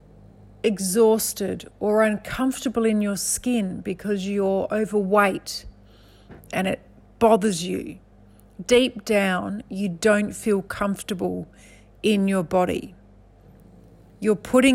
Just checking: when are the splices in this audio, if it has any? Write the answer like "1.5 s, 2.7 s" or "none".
6.4 s